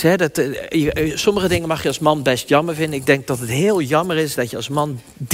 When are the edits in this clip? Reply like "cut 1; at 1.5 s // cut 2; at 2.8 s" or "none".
none